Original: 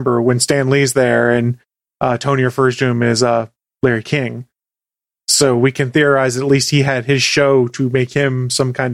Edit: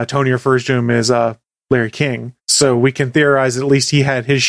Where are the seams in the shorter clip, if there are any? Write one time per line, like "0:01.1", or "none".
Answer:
0:02.4